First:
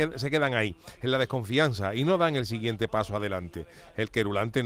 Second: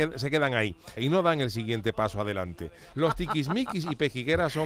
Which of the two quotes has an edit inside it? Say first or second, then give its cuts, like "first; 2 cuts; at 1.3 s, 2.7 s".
second; 2 cuts; at 1.0 s, 2.9 s